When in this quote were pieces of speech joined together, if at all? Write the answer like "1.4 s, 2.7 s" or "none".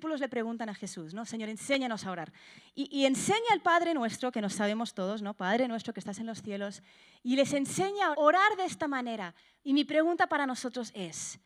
8.1 s, 9.6 s